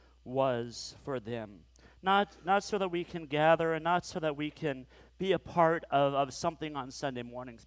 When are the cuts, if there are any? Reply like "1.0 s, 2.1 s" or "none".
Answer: none